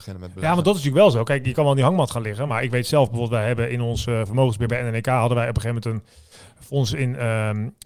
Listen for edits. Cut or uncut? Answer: uncut